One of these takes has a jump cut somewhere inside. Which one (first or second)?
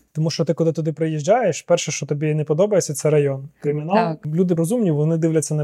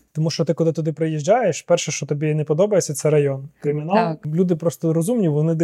first